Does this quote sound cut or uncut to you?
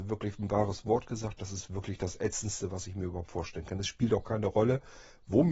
uncut